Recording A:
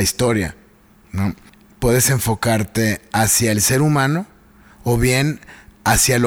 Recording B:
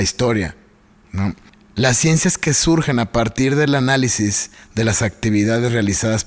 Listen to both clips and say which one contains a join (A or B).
A